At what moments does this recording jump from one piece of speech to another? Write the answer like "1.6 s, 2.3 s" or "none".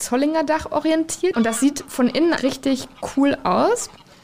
1.3 s, 2.4 s